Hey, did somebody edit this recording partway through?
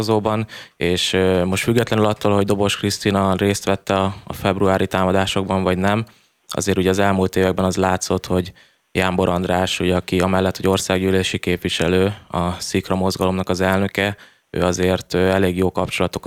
no; 0 cuts

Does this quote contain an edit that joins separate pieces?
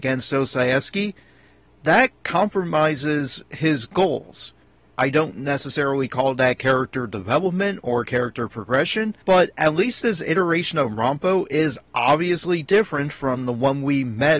yes; 2 cuts; at 4.9 s, 9.2 s

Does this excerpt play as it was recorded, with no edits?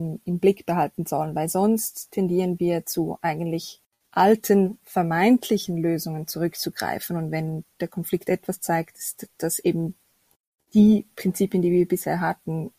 yes; 0 cuts

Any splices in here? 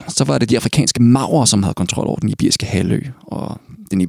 no; 0 cuts

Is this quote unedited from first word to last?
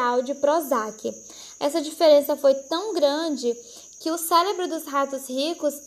no; 1 cut; at 1.6 s

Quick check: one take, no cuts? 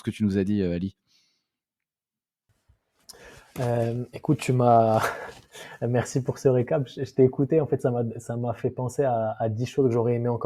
yes; 0 cuts

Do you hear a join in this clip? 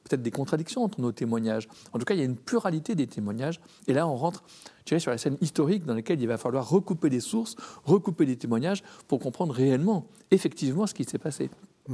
no; 0 cuts

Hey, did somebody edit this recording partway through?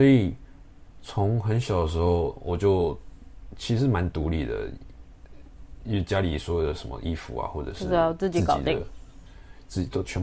no; 0 cuts

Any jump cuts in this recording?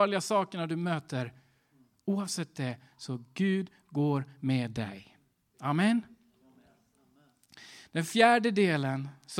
no; 0 cuts

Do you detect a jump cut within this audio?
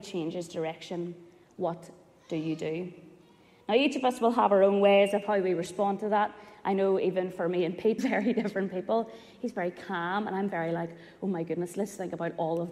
yes; 1 cut; at 8.0 s

